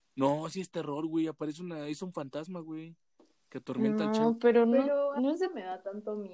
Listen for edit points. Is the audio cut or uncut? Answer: uncut